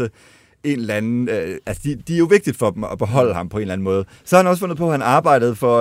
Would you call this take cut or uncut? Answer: cut